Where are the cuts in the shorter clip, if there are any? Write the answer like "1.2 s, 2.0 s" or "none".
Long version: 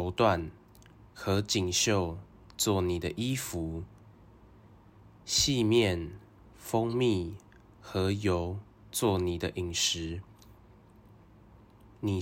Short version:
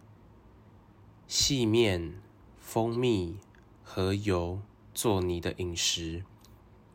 none